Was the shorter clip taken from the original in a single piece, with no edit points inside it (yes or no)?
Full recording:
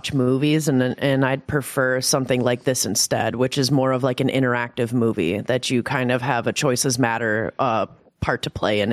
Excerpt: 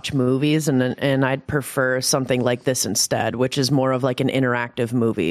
yes